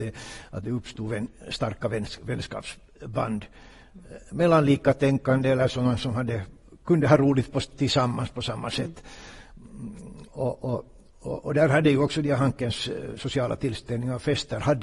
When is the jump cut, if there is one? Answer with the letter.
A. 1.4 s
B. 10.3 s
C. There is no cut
B